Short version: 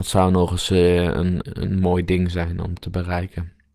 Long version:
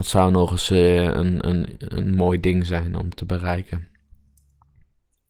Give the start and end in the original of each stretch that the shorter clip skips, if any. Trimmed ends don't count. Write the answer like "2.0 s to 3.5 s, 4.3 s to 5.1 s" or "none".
1.4 s to 1.8 s